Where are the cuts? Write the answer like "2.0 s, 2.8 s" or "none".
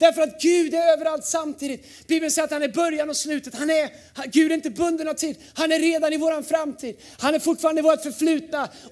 none

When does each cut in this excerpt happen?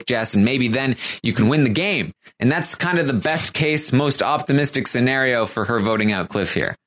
none

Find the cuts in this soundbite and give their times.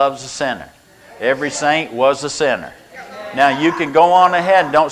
none

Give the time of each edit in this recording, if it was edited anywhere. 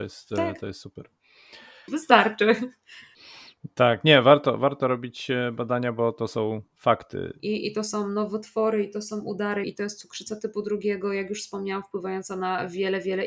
1.9 s, 7.4 s, 9.6 s

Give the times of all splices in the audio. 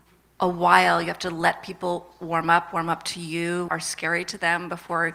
3.7 s

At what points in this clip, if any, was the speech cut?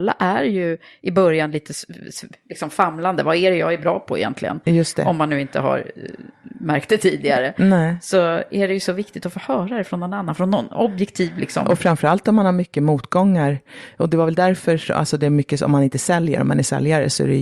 none

